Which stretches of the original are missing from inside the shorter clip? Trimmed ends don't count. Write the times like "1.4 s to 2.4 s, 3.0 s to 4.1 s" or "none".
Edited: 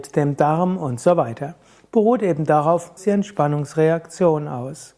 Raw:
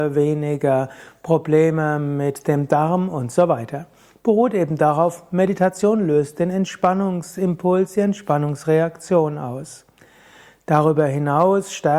5.3 s to 7.9 s